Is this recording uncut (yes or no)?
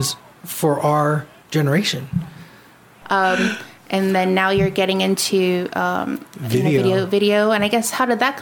no